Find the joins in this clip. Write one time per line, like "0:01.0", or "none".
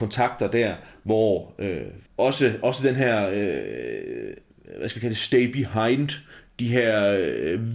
0:02.1